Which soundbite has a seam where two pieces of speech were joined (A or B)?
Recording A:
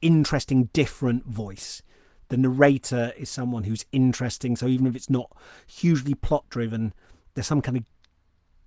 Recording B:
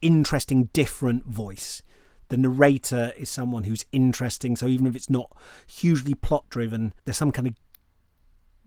B